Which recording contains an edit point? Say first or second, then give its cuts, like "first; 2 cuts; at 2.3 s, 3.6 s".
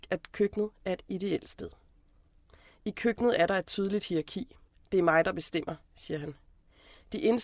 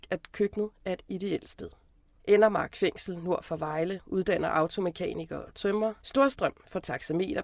second; 2 cuts; at 2.2 s, 6.0 s